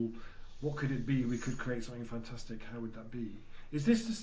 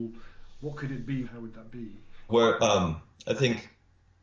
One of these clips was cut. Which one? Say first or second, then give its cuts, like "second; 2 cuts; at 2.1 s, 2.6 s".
second; 2 cuts; at 1.2 s, 2.3 s